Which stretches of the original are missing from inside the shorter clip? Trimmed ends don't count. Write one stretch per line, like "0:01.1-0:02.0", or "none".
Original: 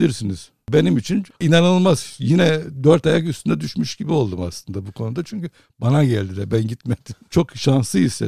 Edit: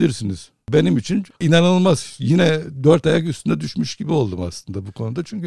none